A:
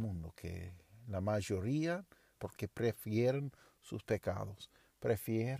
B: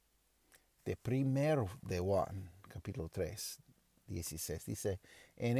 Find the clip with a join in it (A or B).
A